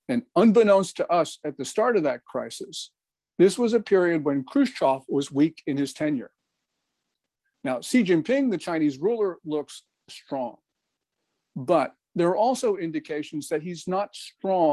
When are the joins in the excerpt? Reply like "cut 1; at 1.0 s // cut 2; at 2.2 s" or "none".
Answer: none